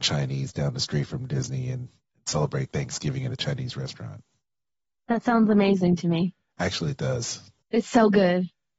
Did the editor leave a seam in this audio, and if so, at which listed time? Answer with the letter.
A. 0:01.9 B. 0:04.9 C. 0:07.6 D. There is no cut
C